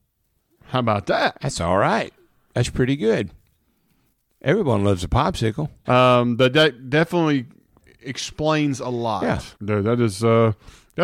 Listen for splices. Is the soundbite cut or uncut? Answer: cut